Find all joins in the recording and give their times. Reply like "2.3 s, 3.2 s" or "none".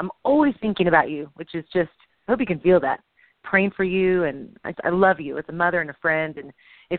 3.4 s, 4.7 s